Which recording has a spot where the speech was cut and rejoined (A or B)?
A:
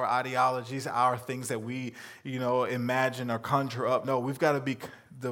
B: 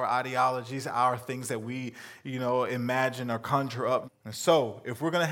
B